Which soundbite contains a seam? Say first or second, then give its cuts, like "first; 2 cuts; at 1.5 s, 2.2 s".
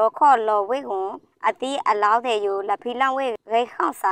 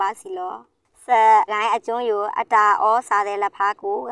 second; 1 cut; at 1.5 s